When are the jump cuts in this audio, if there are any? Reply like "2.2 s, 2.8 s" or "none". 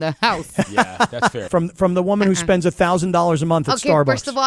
1.5 s